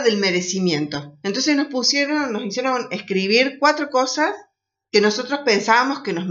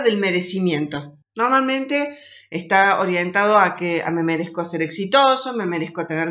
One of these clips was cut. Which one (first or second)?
second